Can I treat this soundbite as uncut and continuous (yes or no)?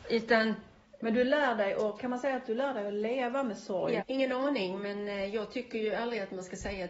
no